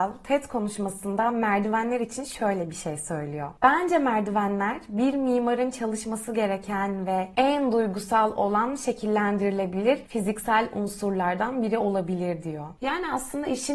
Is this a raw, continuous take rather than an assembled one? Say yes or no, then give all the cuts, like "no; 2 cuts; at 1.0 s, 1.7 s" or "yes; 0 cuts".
yes; 0 cuts